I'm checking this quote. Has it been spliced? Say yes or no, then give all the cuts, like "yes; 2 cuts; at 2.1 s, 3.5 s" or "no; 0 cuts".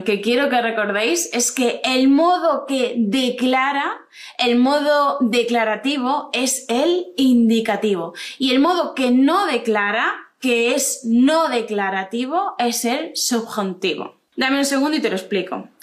yes; 1 cut; at 14.3 s